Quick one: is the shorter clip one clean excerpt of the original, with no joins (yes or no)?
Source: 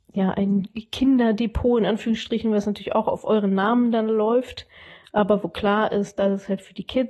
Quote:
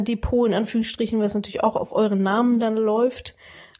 yes